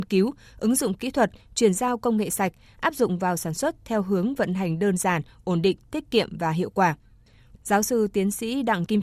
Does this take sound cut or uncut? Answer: cut